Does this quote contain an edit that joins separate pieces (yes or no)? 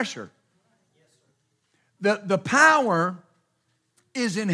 no